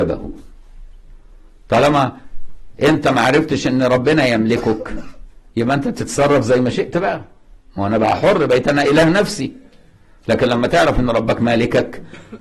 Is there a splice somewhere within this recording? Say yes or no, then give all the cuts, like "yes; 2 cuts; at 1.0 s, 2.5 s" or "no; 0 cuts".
no; 0 cuts